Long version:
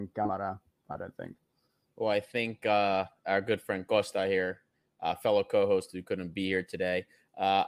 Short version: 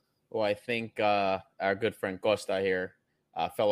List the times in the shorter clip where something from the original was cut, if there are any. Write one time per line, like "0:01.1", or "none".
none